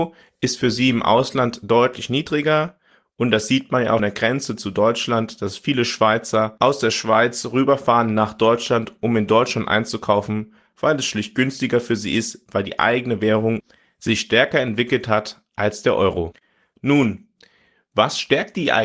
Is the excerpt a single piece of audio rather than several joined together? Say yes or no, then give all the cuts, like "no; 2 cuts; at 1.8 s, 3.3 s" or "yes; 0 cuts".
no; 1 cut; at 4.0 s